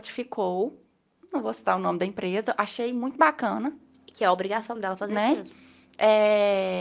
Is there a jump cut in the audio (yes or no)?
no